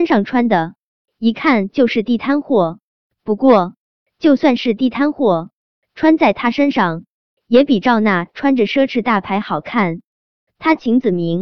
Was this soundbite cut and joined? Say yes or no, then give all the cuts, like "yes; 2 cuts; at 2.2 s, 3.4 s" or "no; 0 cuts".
yes; 1 cut; at 10.5 s